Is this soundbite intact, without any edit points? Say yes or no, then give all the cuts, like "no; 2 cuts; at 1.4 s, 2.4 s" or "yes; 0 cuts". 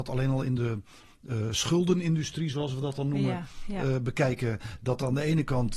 yes; 0 cuts